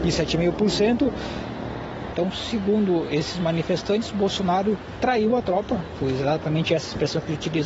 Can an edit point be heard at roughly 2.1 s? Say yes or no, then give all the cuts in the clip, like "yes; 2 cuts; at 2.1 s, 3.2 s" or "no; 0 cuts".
yes; 1 cut; at 2.1 s